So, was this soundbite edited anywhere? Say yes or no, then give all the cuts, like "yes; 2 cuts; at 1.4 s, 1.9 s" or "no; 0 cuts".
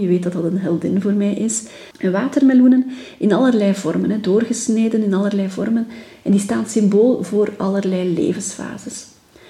yes; 1 cut; at 1.9 s